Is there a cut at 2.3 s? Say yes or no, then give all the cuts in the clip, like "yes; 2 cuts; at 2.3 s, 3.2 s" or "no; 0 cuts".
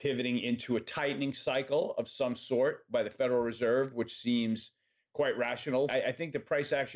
no; 1 cut; at 5.9 s